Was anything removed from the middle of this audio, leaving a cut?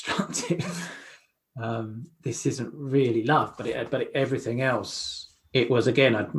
no; 0 cuts

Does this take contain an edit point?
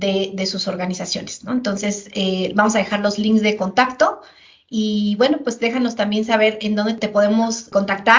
no; 0 cuts

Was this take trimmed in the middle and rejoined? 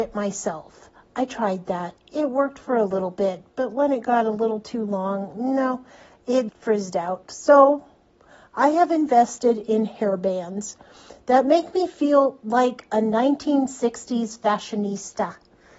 yes; 1 cut; at 6.5 s

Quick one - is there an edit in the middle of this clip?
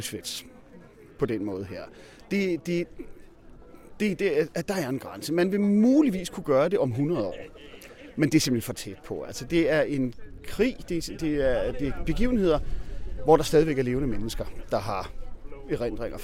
no; 0 cuts

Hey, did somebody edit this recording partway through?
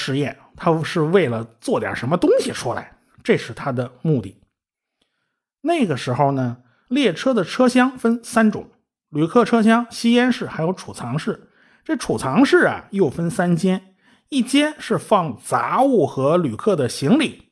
no; 0 cuts

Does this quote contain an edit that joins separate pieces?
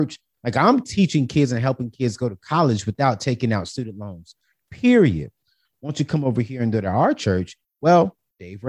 yes; 2 cuts; at 5.6 s, 7.6 s

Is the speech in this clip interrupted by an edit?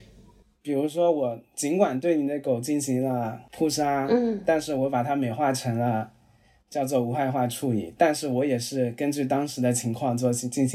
no; 0 cuts

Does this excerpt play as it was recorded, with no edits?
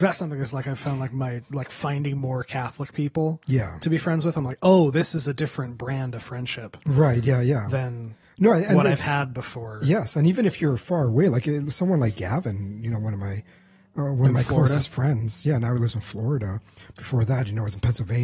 yes; 0 cuts

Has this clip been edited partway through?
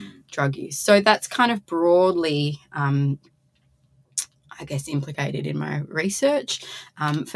no; 0 cuts

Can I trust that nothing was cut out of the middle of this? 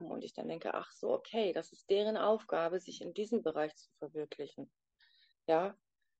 yes; 0 cuts

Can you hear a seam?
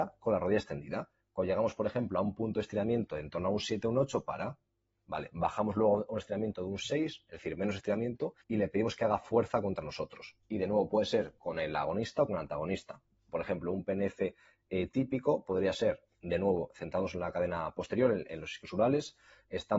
yes; 2 cuts; at 8.4 s, 10.4 s

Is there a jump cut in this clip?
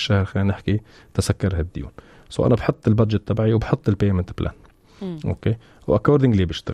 no; 0 cuts

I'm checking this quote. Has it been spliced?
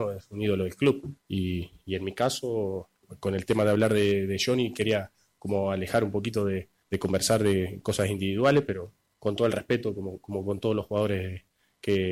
no; 0 cuts

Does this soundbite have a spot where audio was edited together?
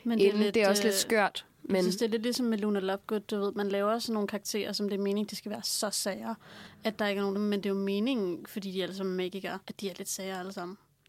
yes; 2 cuts; at 7.3 s, 9.6 s

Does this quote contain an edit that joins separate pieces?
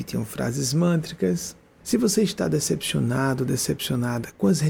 yes; 1 cut; at 1.8 s

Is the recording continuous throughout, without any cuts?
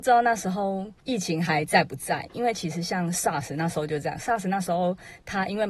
no; 1 cut; at 1.0 s

